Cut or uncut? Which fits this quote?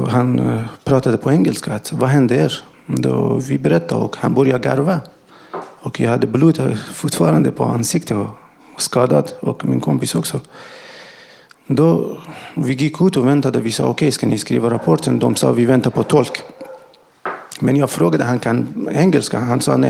uncut